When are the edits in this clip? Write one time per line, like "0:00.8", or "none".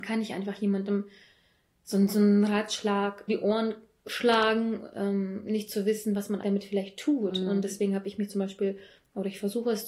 0:03.3
0:06.4